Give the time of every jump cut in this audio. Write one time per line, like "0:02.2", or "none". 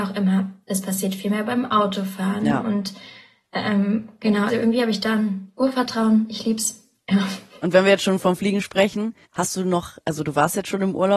0:04.5
0:09.2